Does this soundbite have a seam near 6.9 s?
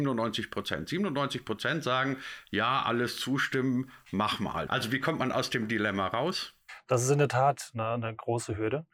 no; 1 cut; at 4.7 s

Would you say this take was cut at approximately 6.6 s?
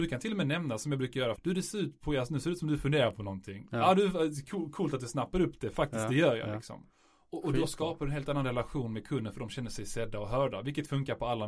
no; 1 cut; at 1.4 s

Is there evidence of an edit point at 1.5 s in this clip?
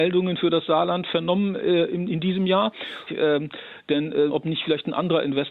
no; 2 cuts; at 3.1 s, 4.3 s

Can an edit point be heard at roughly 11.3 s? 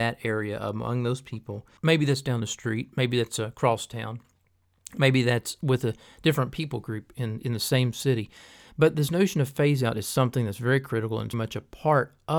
yes; 2 cuts; at 1.8 s, 11.3 s

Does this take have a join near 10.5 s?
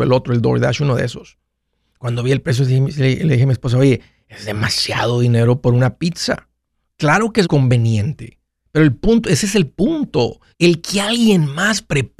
yes; 2 cuts; at 7.4 s, 10.5 s

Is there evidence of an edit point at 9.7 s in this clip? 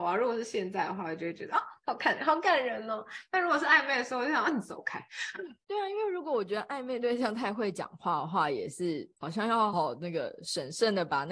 yes; 1 cut; at 9.7 s

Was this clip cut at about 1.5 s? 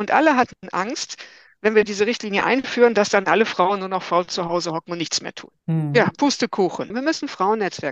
no; 2 cuts; at 5.6 s, 6.9 s

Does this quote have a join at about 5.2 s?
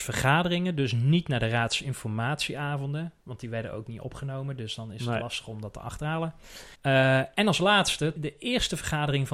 no; 2 cuts; at 6.7 s, 8.2 s

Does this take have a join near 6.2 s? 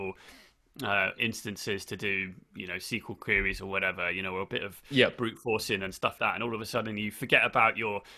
yes; 1 cut; at 6.2 s

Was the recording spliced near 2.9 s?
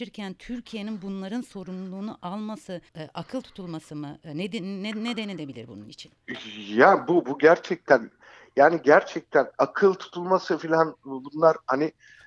yes; 1 cut; at 2.9 s

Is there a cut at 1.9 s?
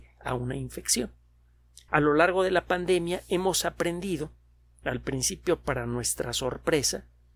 yes; 1 cut; at 1.9 s

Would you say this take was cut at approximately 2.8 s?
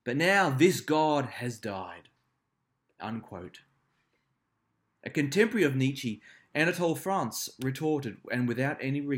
no; 0 cuts

